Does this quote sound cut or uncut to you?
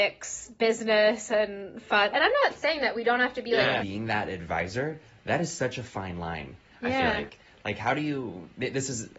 cut